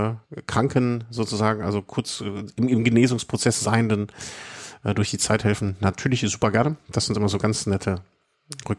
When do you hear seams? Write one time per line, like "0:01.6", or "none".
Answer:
none